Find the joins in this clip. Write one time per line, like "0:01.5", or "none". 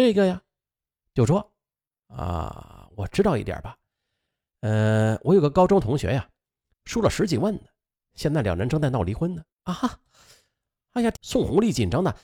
0:06.7
0:09.5
0:11.1